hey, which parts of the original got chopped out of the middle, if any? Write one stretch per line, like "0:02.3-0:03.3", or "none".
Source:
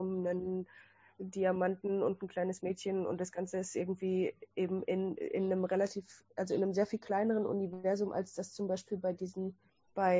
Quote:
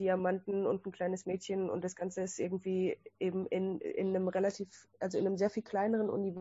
none